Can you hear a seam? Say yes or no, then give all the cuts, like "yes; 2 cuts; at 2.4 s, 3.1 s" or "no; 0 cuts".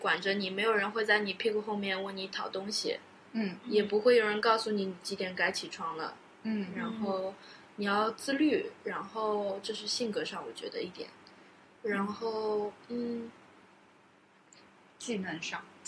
yes; 1 cut; at 11.7 s